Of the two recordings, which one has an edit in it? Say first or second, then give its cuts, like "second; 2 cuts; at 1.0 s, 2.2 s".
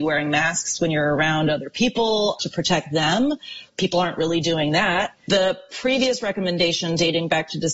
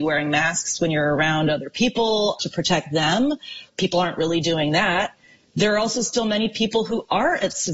first; 1 cut; at 5.3 s